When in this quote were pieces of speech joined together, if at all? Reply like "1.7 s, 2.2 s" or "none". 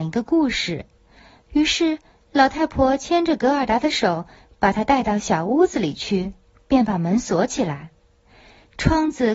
none